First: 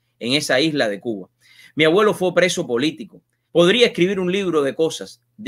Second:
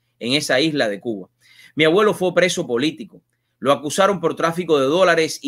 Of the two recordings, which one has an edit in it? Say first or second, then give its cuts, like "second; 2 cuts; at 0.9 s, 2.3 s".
first; 1 cut; at 3.5 s